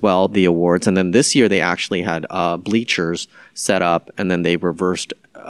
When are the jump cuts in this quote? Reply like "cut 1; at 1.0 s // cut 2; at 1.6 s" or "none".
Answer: none